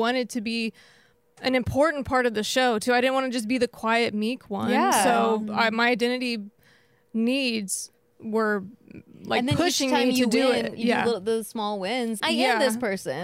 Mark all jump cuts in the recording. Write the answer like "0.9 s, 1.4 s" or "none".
12.2 s

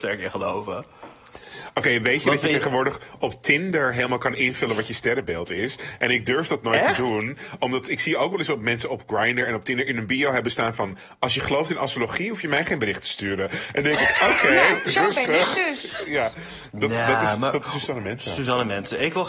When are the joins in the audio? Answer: none

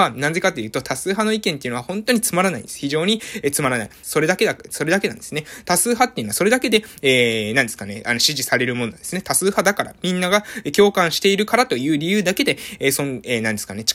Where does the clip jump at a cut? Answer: 4.0 s

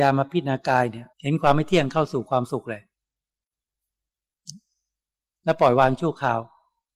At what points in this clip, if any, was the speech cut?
1.1 s

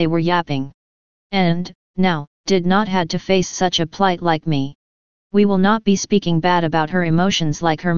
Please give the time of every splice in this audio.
2.3 s

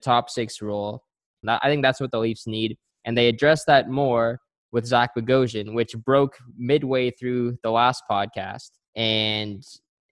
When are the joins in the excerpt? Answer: 1.4 s, 8.8 s

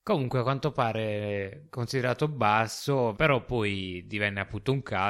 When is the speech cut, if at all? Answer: 3.1 s

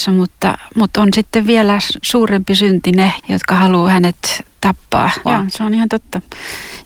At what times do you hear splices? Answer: 3.2 s, 5.3 s

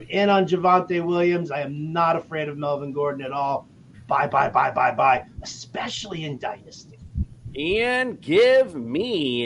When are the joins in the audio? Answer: none

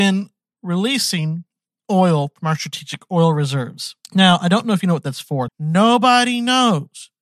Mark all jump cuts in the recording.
4.0 s, 5.5 s

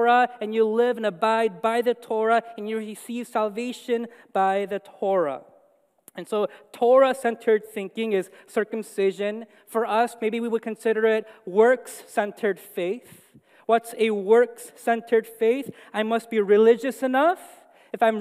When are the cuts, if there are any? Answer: none

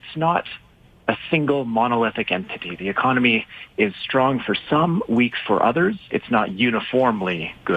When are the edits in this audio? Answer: none

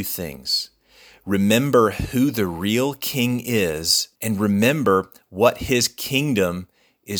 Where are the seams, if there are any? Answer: 4.2 s

